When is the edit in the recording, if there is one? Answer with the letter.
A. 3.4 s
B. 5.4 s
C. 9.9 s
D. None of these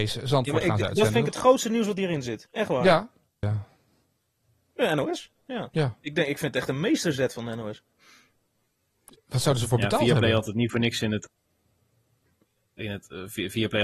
A